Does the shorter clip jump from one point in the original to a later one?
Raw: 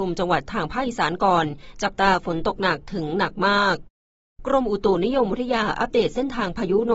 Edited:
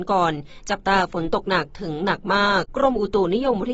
yes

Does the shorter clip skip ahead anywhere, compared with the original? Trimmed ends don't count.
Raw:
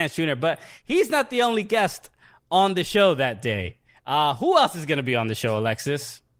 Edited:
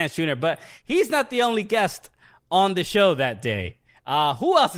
no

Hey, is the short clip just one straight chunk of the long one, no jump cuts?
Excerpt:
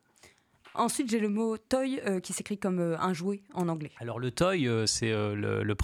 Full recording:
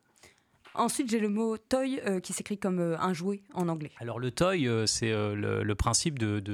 yes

